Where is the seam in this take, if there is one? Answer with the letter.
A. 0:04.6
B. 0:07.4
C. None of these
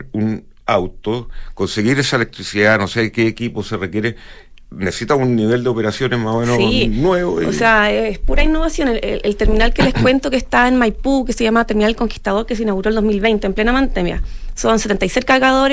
C